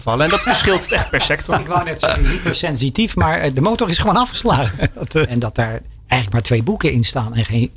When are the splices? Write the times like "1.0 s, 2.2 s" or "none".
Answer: 5.3 s

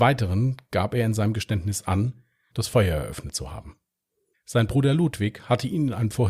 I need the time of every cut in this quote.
2.5 s, 4.3 s

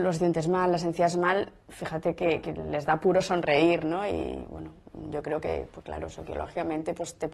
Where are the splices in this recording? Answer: 2.4 s

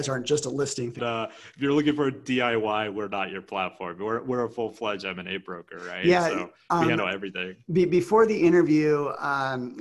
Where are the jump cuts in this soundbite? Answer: 1.0 s

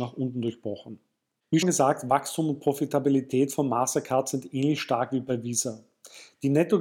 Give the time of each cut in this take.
1.6 s

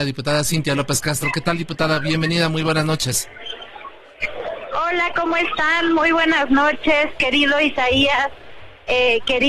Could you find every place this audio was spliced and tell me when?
none

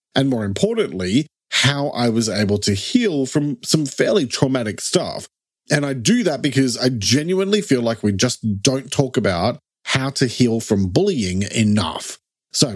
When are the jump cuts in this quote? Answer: none

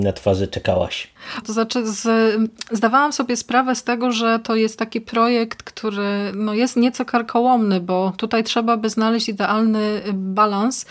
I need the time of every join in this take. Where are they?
1.4 s

